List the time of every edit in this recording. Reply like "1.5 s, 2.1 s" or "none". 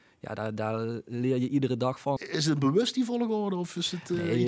2.2 s